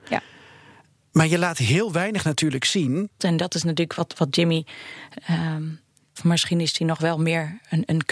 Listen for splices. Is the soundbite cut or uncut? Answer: cut